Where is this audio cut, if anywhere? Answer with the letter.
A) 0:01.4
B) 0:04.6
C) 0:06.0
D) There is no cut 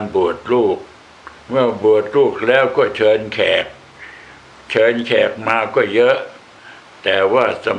A